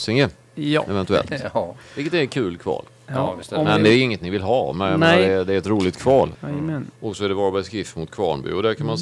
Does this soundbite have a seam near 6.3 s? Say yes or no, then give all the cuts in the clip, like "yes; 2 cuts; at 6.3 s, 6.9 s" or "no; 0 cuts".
yes; 1 cut; at 6.3 s